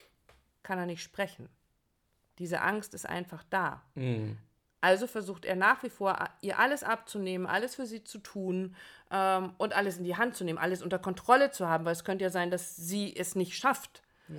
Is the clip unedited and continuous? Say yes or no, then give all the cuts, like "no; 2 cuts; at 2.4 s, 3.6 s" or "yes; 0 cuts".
yes; 0 cuts